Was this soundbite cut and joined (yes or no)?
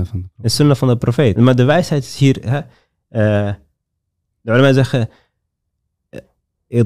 yes